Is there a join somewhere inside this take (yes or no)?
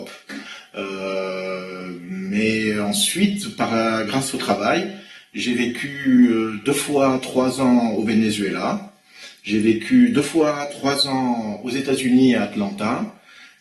no